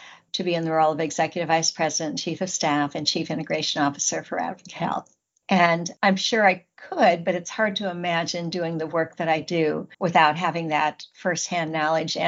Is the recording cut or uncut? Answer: cut